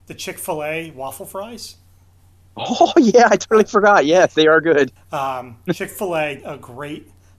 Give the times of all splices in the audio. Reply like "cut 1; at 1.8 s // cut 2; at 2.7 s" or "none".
cut 1; at 5.0 s // cut 2; at 6.4 s